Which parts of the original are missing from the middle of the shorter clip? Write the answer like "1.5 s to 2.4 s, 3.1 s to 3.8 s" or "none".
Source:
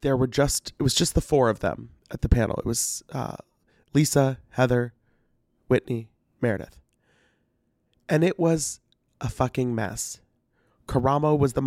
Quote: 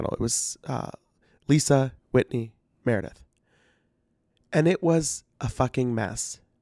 4.4 s to 5.5 s, 8.9 s to 9.1 s